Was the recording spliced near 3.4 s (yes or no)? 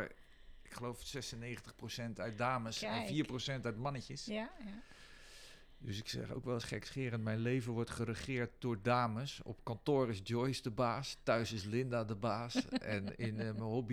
no